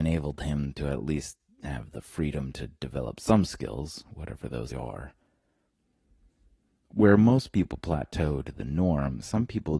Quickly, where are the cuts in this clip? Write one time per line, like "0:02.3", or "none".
0:04.7